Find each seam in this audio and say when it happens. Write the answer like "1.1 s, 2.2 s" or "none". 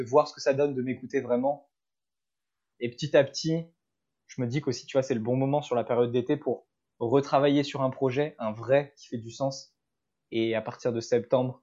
2.7 s